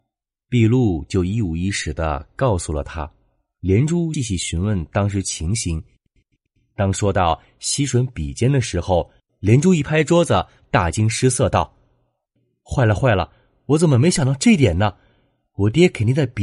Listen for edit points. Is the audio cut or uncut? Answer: cut